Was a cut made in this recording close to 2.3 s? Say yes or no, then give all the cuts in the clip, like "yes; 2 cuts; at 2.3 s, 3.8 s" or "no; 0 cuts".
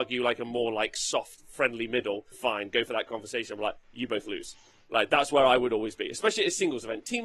yes; 1 cut; at 2.3 s